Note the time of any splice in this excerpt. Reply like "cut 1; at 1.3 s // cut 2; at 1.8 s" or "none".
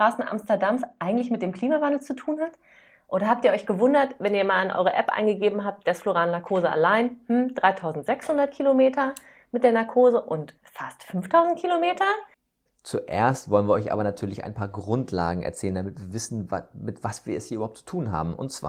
cut 1; at 10.6 s